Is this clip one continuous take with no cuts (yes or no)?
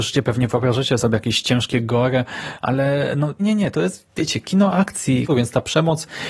no